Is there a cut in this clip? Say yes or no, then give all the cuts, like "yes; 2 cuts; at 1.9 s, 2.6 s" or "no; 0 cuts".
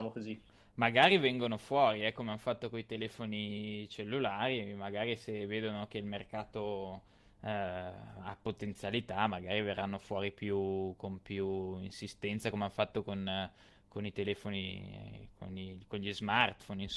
no; 0 cuts